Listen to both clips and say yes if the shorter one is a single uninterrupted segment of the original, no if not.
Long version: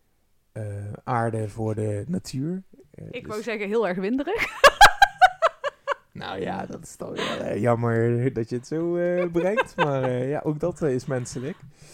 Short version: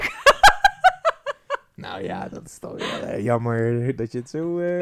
yes